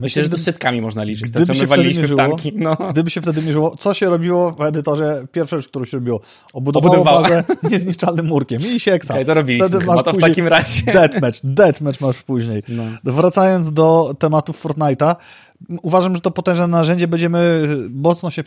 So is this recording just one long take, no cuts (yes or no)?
yes